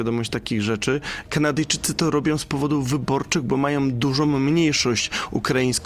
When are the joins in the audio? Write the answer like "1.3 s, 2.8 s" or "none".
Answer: 1.2 s